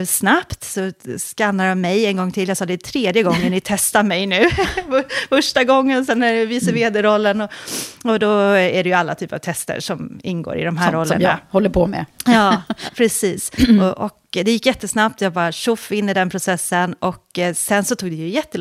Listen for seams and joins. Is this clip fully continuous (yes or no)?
no